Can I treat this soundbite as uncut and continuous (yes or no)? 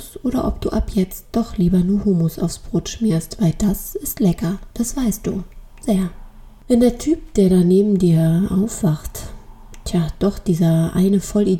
yes